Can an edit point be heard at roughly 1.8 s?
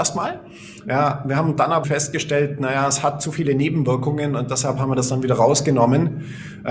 yes; 1 cut; at 1.8 s

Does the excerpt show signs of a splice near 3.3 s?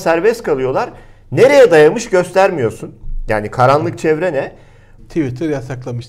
no; 1 cut; at 5.0 s

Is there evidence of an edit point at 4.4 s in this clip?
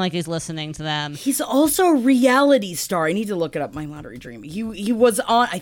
no; 0 cuts

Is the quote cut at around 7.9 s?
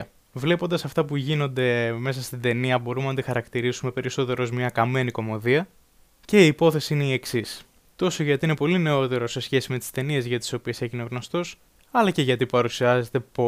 yes; 1 cut; at 7.9 s

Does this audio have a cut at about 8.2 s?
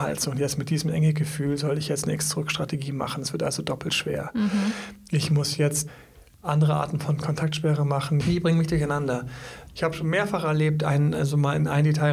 yes; 1 cut; at 8.2 s

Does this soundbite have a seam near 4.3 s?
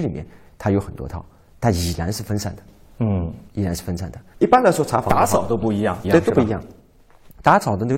yes; 2 cuts; at 4.3 s, 6.0 s

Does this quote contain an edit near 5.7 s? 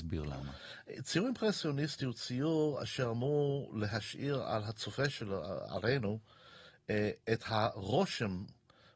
no; 0 cuts

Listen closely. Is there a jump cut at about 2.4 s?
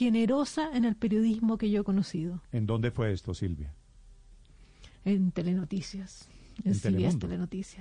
yes; 1 cut; at 2.4 s

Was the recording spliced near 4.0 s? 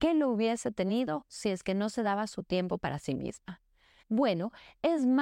yes; 1 cut; at 4.0 s

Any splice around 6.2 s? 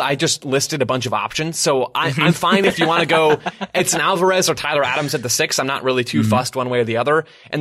no; 0 cuts

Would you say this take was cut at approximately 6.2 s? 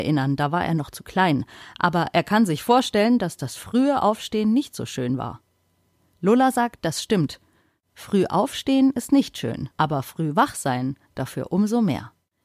no; 1 cut; at 9.7 s

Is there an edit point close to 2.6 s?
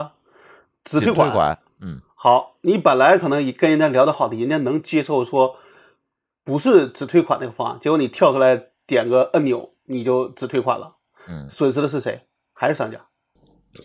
no; 1 cut; at 4.1 s

